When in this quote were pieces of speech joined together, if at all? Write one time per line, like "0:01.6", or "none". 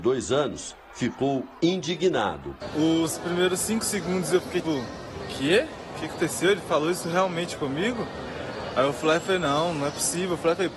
0:04.6